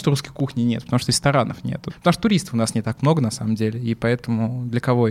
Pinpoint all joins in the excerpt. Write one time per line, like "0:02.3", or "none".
0:01.9